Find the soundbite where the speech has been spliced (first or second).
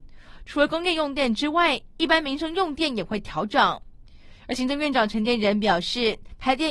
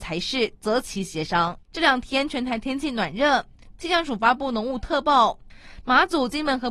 second